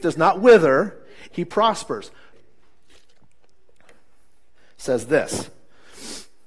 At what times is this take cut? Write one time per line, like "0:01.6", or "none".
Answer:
0:01.3
0:02.3